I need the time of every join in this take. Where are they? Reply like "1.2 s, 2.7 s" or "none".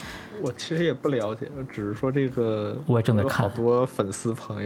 none